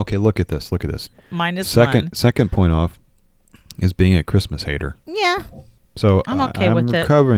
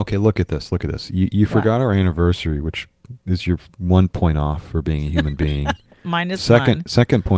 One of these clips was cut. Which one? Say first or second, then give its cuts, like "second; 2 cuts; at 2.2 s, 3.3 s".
first; 1 cut; at 1.1 s